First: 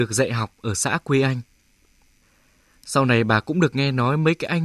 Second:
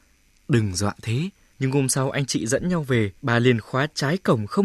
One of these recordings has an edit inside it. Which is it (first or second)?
second